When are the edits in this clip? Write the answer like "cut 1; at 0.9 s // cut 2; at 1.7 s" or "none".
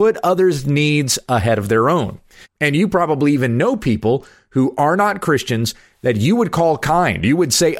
cut 1; at 2.4 s